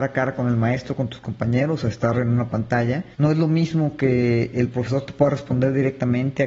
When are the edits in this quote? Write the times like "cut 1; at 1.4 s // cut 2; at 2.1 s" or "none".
cut 1; at 3.1 s